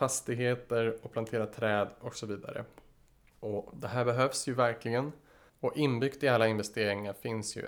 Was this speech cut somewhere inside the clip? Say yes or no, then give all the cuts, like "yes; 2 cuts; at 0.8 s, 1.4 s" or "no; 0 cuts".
yes; 1 cut; at 5.5 s